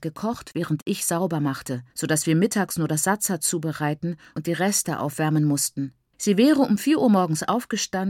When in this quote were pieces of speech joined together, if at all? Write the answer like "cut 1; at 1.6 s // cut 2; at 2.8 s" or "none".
cut 1; at 1.9 s // cut 2; at 6.1 s